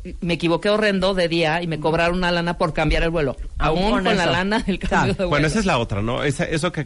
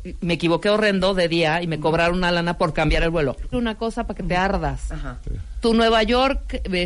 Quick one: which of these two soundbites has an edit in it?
second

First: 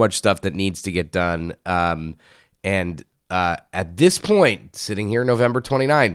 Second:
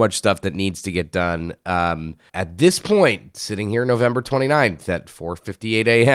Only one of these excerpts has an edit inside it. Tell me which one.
second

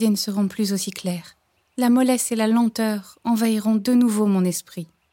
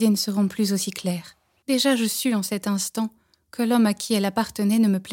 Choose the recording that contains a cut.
second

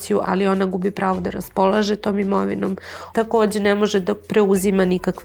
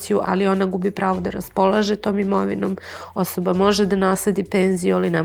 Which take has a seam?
first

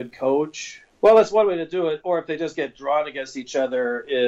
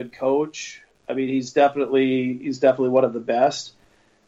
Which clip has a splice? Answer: first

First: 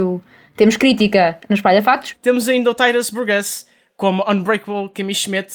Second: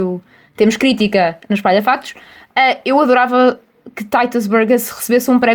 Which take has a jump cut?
first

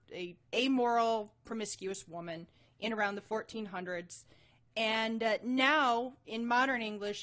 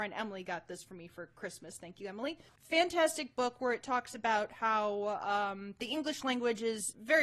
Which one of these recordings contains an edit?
second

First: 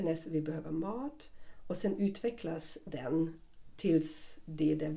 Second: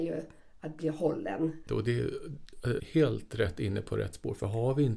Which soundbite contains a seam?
second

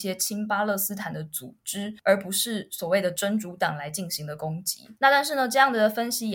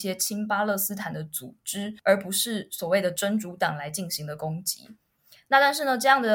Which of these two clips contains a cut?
first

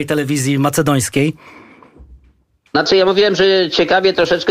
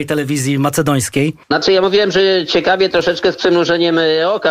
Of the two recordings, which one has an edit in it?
second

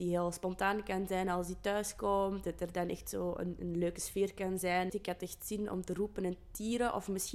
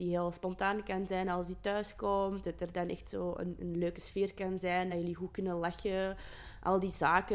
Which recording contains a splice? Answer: first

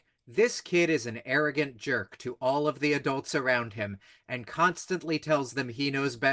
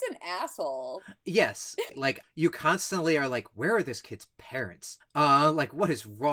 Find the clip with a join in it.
second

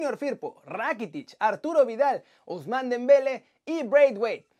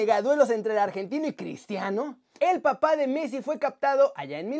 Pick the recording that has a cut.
second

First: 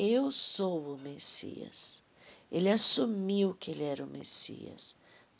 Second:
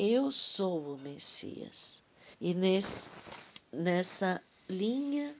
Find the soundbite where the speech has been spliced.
second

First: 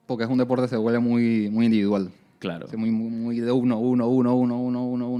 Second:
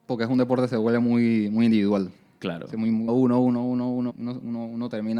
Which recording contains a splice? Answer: second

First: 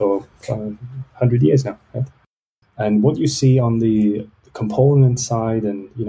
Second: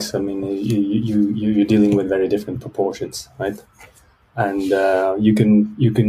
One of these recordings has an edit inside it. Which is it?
first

